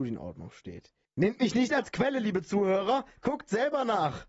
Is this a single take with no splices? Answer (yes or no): yes